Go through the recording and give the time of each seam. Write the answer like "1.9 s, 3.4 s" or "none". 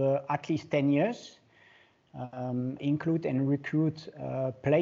2.8 s